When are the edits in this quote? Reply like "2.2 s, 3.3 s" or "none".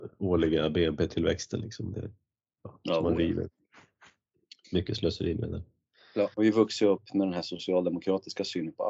6.3 s

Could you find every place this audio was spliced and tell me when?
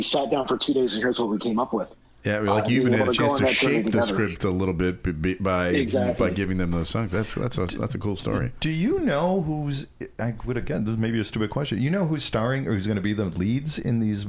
none

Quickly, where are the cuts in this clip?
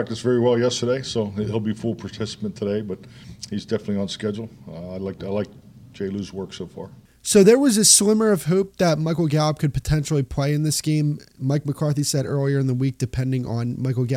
none

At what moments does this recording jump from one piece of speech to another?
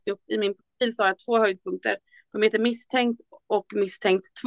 none

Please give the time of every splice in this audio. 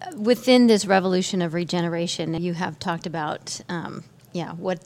2.4 s

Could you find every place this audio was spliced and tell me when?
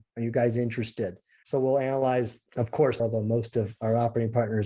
1.4 s, 3.0 s

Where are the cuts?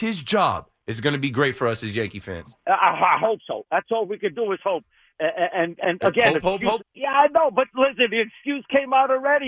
2.6 s, 6.8 s

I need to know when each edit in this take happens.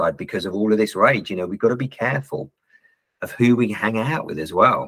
none

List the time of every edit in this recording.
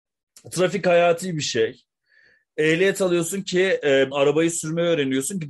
4.1 s

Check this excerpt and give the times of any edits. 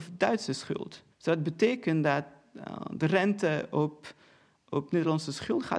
1.1 s

